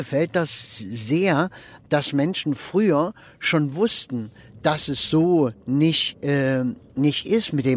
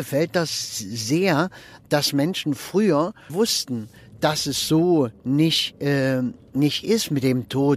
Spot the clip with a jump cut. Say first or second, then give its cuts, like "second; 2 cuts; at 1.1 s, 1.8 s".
second; 1 cut; at 3.3 s